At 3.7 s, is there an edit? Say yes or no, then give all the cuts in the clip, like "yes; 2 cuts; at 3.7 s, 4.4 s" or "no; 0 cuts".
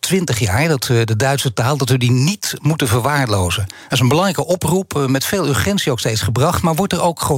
no; 0 cuts